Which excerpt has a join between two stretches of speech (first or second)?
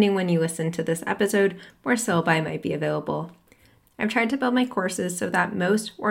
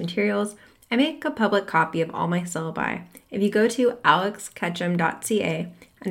first